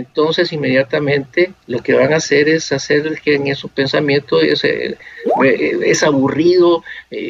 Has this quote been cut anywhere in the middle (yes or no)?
no